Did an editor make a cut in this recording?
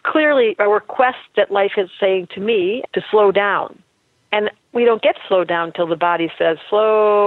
yes; 1 cut; at 2.9 s

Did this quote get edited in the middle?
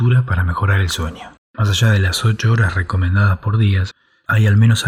yes; 1 cut; at 1.4 s

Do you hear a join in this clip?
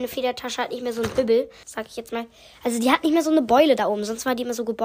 yes; 1 cut; at 1.6 s

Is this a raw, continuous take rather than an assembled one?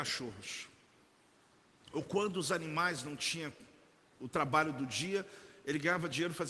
yes; 0 cuts

